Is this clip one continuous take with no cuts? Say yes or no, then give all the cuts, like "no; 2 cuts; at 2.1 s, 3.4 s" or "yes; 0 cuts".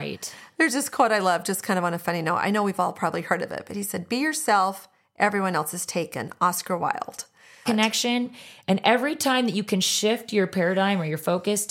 no; 1 cut; at 7.7 s